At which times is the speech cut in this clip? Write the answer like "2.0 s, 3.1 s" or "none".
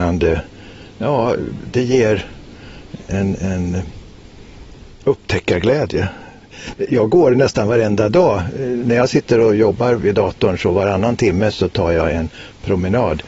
3.1 s